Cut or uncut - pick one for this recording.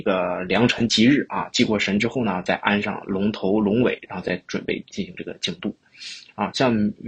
cut